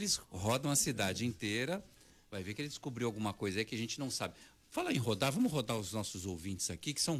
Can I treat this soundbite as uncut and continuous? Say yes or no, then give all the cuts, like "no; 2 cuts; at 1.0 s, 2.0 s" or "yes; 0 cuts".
yes; 0 cuts